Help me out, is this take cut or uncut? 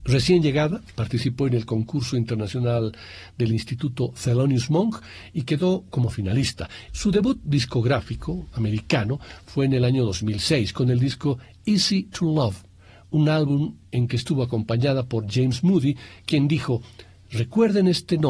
cut